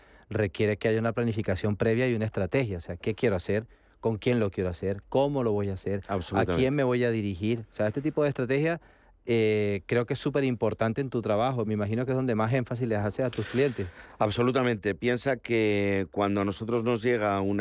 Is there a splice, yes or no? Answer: no